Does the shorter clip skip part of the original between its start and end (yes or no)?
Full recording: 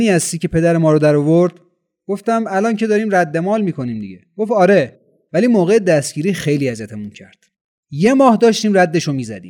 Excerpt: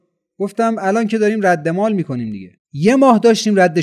yes